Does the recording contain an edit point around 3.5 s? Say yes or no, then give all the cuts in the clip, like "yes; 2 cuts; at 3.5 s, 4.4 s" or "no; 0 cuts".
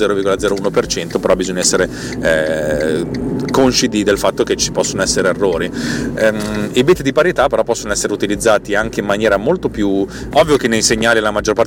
no; 1 cut; at 10.3 s